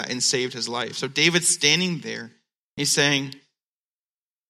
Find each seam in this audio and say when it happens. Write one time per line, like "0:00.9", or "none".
none